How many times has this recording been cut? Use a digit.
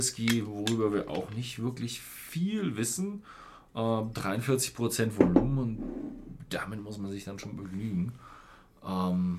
0